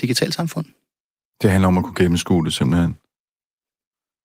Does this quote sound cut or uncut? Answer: uncut